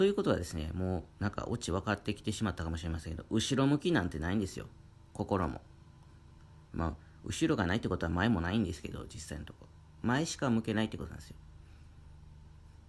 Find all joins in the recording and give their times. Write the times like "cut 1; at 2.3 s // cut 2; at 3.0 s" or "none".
cut 1; at 6.6 s